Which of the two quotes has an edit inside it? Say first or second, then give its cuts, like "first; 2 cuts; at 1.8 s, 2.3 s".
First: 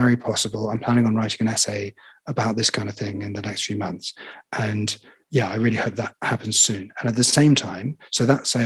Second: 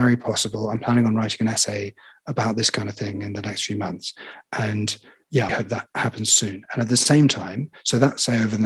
second; 1 cut; at 5.5 s